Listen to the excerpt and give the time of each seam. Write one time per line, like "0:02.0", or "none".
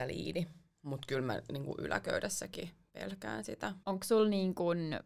0:03.8